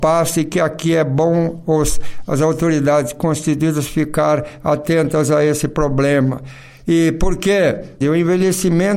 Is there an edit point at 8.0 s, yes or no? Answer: yes